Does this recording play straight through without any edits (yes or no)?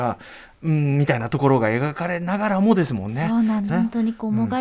no